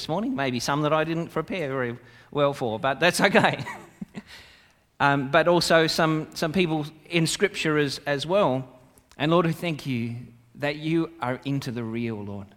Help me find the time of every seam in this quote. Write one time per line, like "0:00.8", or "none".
0:09.1